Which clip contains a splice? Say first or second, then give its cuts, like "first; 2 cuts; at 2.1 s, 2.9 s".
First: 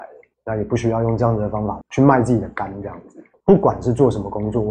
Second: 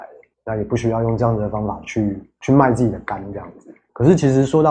first; 2 cuts; at 1.8 s, 3.3 s